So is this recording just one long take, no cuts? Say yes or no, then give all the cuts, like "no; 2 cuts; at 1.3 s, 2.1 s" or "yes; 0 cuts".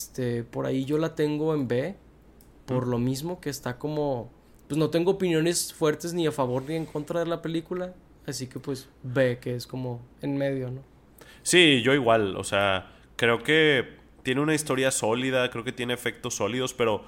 yes; 0 cuts